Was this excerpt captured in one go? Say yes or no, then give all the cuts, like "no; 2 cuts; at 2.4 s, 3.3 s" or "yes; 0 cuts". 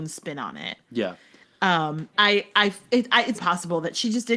no; 2 cuts; at 2.1 s, 3.3 s